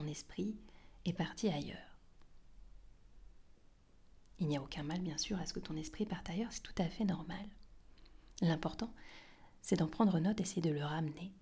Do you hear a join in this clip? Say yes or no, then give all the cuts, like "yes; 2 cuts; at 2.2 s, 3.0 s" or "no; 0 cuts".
no; 0 cuts